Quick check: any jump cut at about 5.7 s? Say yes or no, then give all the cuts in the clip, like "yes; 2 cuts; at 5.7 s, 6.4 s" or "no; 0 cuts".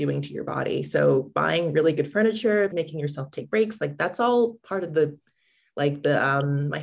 no; 1 cut; at 2.7 s